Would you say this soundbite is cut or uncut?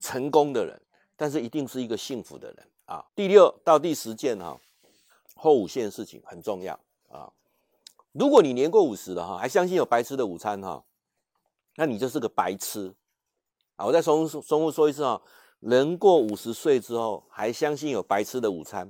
cut